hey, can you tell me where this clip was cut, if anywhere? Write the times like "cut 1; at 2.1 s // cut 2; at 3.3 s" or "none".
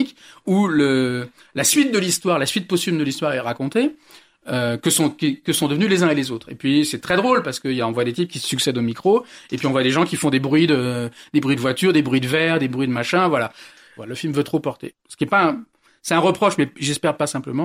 cut 1; at 14.0 s